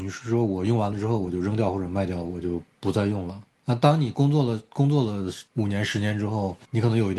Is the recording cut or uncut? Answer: uncut